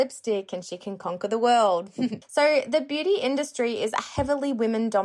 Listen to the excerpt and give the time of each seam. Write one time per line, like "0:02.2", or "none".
0:02.2

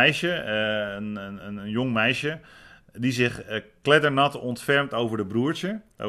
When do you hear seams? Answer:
none

